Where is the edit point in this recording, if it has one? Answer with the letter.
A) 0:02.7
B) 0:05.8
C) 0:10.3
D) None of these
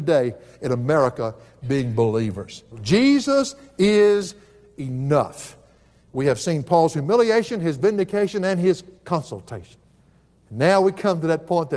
A